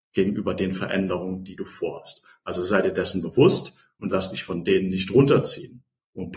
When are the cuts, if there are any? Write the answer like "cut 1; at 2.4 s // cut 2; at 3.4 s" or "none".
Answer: none

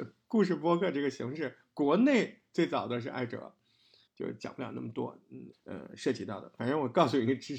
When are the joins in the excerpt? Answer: cut 1; at 4.1 s // cut 2; at 5.5 s

